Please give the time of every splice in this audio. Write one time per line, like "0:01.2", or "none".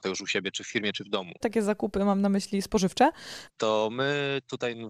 0:01.4
0:03.5